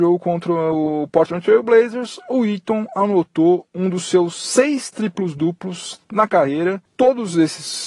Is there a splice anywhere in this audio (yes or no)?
no